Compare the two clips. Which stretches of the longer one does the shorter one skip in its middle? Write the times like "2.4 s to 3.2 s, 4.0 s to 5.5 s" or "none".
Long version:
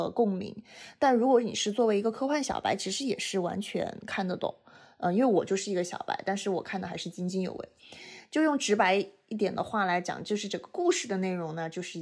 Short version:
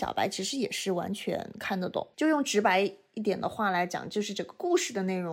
4.6 s to 8.3 s